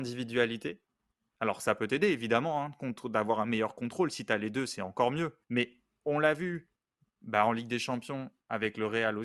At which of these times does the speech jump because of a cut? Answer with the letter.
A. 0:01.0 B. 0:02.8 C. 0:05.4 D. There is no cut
C